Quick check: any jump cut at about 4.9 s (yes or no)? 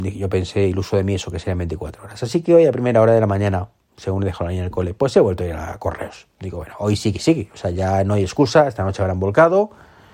no